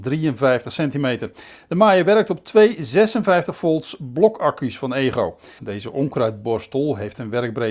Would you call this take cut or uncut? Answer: cut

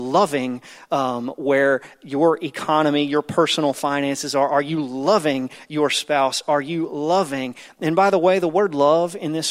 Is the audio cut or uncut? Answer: uncut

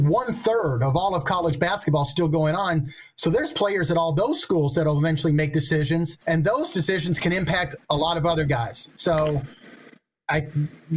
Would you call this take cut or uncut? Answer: cut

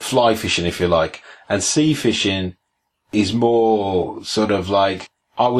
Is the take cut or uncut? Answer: uncut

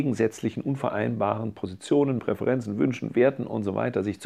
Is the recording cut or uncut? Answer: cut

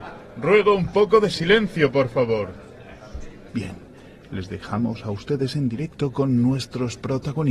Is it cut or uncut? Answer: cut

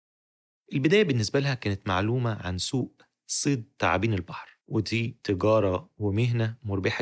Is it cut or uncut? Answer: cut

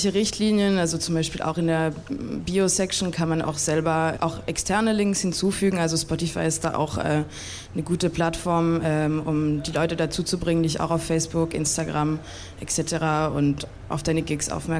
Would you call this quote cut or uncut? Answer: cut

